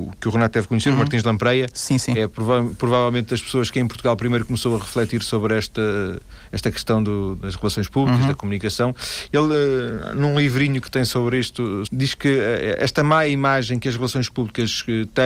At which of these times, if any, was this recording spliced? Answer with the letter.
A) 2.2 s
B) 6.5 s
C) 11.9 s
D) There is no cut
C